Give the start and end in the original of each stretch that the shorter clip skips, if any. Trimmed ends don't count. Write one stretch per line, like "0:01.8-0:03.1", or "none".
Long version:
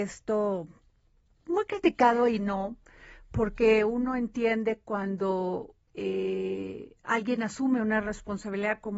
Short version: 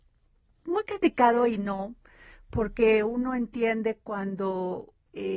none